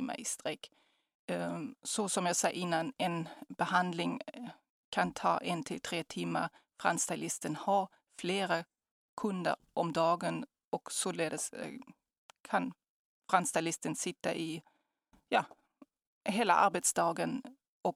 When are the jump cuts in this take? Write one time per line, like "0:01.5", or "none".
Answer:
none